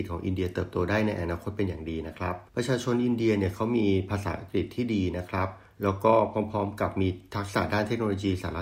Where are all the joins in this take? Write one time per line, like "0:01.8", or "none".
0:02.5

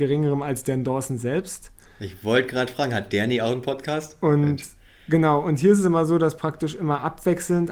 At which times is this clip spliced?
none

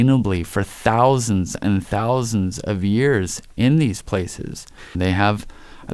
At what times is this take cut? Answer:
0:04.9

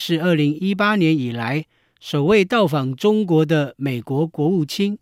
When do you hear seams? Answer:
none

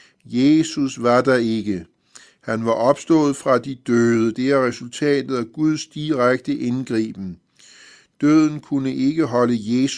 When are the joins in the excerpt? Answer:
0:04.3

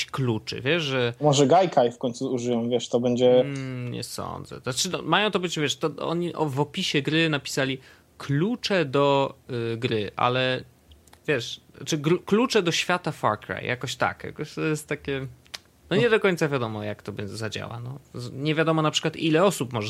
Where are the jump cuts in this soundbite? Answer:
none

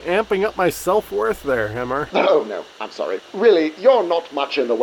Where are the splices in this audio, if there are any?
0:02.1
0:03.2

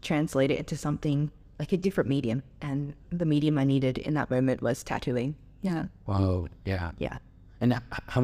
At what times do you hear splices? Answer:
none

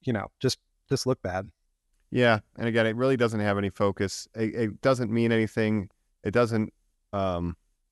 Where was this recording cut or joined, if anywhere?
none

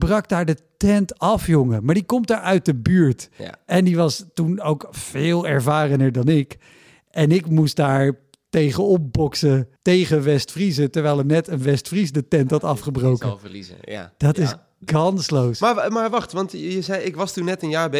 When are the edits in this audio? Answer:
0:09.8

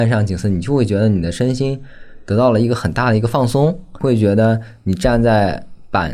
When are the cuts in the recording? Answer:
0:04.0

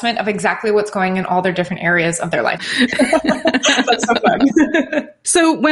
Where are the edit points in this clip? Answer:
0:02.6

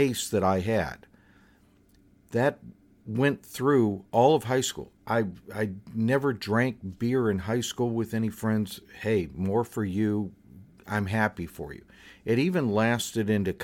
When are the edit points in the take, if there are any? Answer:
none

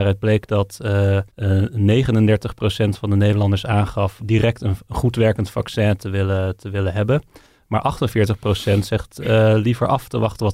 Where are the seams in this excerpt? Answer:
0:01.3
0:04.2

